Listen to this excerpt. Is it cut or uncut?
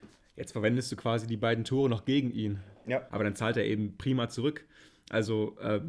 cut